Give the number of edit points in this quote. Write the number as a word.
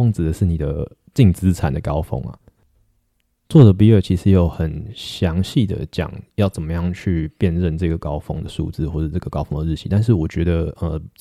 zero